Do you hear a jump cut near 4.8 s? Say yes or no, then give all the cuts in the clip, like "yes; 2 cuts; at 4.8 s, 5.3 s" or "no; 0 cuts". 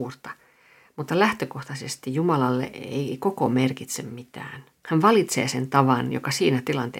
yes; 1 cut; at 4.8 s